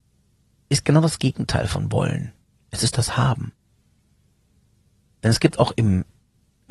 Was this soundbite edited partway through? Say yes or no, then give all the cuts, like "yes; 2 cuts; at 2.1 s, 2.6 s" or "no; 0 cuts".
no; 0 cuts